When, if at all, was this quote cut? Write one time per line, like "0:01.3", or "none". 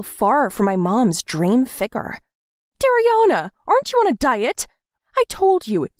0:02.7